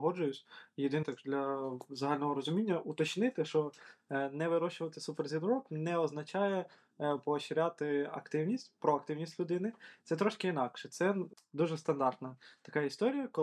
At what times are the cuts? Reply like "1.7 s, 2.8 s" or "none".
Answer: 1.0 s